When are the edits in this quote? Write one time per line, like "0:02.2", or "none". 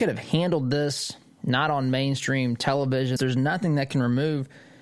0:03.2